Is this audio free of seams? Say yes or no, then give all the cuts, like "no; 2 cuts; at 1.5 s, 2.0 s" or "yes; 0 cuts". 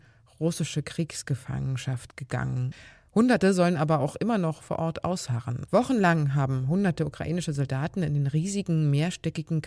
no; 1 cut; at 5.7 s